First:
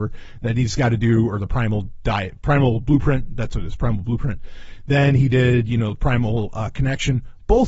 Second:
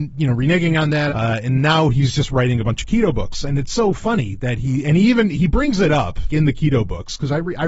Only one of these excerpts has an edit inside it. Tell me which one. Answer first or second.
second